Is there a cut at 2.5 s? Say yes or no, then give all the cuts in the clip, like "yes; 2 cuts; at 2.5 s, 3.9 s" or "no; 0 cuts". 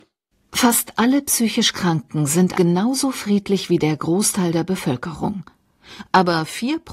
yes; 1 cut; at 2.5 s